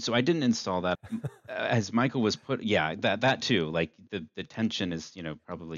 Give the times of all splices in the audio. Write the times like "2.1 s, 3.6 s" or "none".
1.0 s